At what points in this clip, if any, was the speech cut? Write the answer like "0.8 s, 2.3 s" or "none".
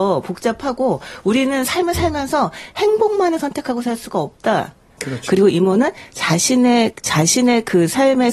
5.0 s